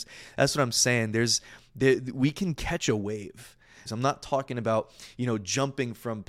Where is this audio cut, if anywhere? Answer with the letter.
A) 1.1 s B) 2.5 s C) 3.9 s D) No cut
C